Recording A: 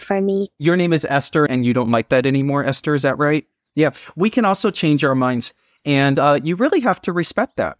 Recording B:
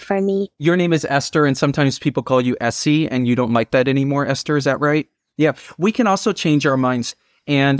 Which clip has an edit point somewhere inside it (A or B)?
A